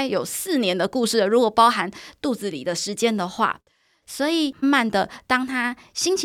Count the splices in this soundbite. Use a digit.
1